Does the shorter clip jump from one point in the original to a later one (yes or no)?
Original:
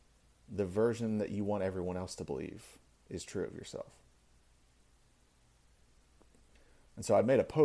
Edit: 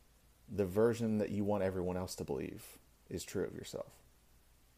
no